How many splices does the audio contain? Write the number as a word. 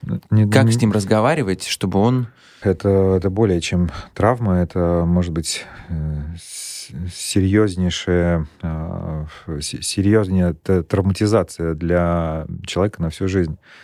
one